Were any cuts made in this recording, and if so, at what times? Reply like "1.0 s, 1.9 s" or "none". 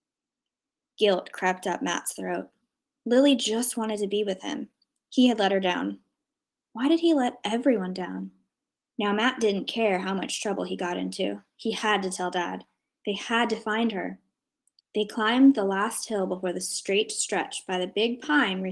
8.8 s, 14.8 s